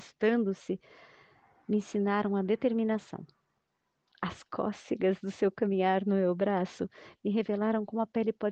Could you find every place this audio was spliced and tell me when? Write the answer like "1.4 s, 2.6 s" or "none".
none